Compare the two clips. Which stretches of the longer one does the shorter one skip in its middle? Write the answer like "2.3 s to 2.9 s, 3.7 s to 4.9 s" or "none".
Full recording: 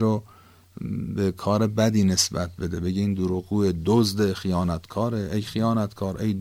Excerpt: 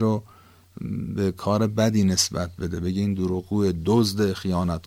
none

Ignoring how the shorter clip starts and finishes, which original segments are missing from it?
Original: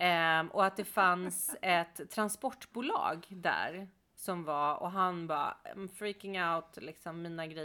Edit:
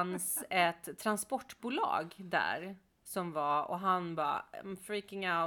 none

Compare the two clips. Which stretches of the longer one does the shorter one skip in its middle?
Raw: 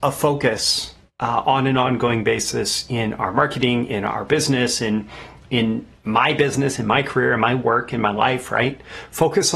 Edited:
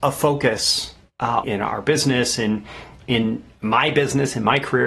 1.4 s to 3.9 s

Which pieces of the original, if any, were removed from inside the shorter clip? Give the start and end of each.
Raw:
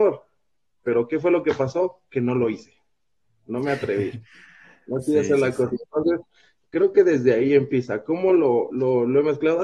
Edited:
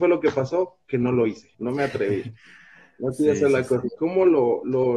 2.8 s to 3.4 s, 5.8 s to 8.0 s

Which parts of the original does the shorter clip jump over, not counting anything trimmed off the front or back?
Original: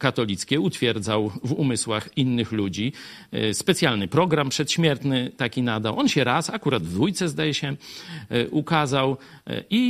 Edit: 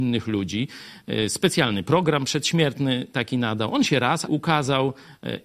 6.5 s to 8.5 s

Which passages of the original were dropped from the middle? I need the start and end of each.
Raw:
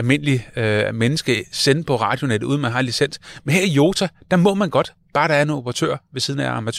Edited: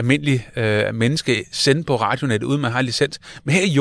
none

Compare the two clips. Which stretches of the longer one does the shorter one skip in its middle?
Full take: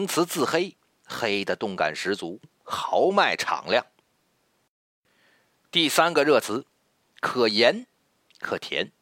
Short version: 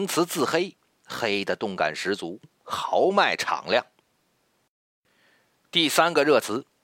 none

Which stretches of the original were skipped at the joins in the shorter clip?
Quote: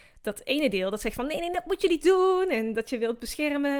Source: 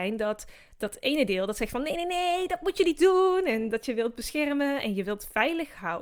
2.1 s to 2.5 s

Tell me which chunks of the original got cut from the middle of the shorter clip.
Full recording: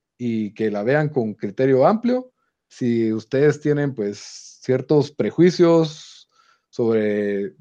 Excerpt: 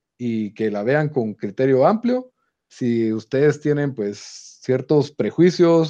none

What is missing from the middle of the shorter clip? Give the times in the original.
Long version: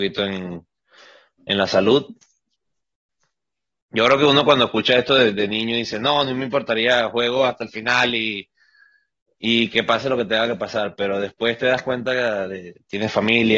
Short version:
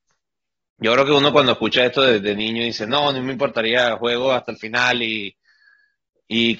none

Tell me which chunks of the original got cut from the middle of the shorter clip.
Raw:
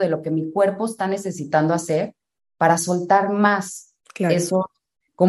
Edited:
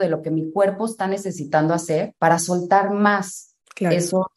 2.2 s to 2.6 s

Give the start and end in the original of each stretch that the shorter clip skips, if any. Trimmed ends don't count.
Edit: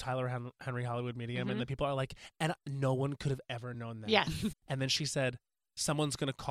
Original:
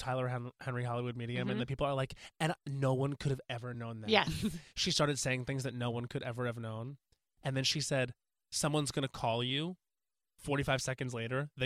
4.5 s to 7.3 s

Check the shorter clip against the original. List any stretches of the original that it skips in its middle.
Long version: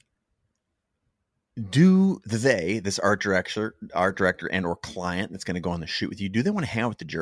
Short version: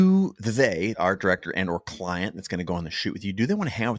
2.8 s to 3.9 s

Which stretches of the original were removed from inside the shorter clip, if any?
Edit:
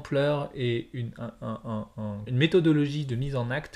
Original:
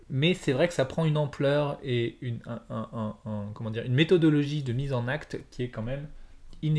3.5 s to 3.8 s

